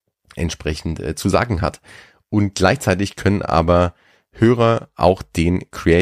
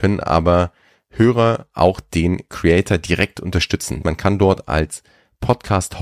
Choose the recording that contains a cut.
second; 1 cut; at 4.0 s

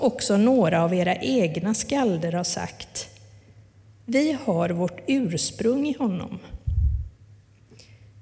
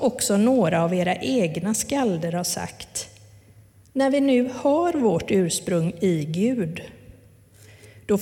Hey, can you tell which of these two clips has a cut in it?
second; 1 cut; at 3.8 s

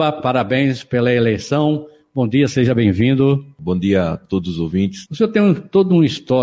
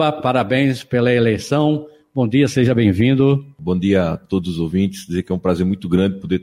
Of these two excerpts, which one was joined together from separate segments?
first; 1 cut; at 5.1 s

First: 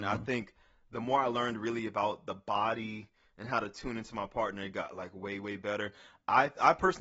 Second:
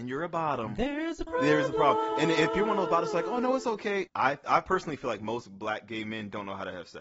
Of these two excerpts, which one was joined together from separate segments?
second; 2 cuts; at 1.3 s, 4.1 s

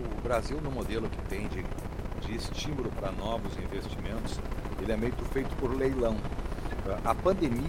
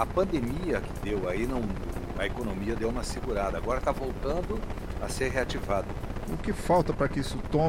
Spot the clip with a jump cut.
second; 1 cut; at 6.3 s

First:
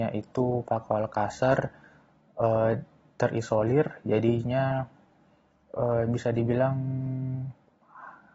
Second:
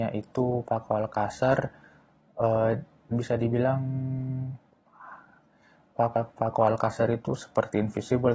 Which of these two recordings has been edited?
second; 2 cuts; at 3.1 s, 6.0 s

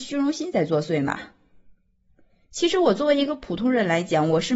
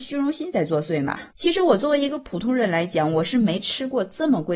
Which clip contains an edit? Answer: second; 1 cut; at 1.3 s

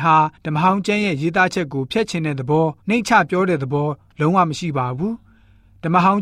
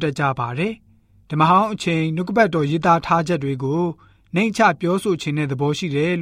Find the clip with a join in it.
first; 1 cut; at 2.8 s

